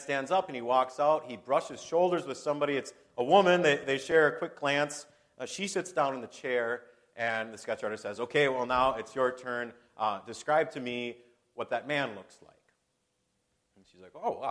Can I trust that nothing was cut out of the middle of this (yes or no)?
yes